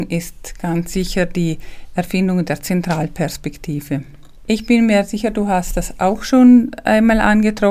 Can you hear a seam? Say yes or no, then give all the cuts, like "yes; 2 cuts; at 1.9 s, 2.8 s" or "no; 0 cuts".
no; 0 cuts